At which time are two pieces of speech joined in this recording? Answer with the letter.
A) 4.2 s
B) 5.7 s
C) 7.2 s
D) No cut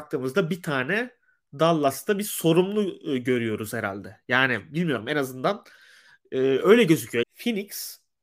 C